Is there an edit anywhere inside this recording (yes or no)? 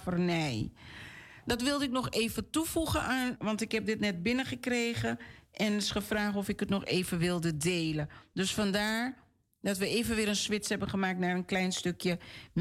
yes